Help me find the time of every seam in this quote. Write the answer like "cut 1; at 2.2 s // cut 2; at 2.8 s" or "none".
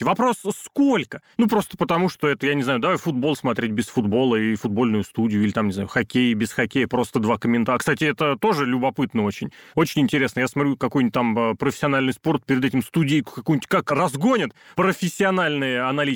none